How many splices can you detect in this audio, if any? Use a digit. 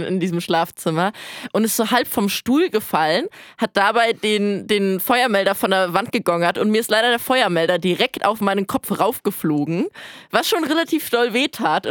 0